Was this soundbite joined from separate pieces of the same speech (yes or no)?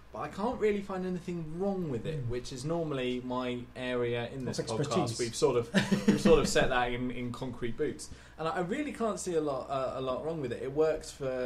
no